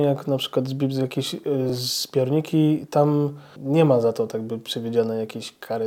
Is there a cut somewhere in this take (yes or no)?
no